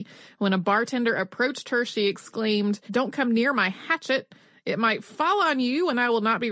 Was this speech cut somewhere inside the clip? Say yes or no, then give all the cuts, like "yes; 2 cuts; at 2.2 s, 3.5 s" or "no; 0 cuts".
yes; 1 cut; at 2.9 s